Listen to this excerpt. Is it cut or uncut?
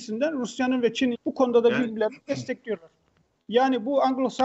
cut